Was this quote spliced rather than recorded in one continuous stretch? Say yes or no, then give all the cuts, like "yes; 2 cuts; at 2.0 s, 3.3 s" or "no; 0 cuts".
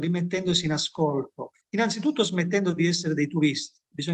yes; 1 cut; at 1.6 s